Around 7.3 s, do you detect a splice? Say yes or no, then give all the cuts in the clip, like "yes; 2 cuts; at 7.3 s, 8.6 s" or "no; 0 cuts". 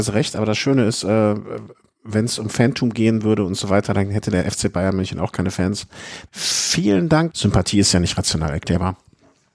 yes; 2 cuts; at 6.3 s, 7.3 s